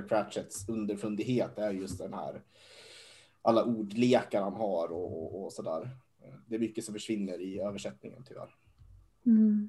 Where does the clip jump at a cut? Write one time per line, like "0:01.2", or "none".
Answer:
none